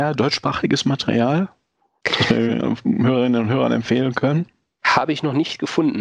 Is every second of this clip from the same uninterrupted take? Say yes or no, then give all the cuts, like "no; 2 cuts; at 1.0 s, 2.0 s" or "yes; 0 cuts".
yes; 0 cuts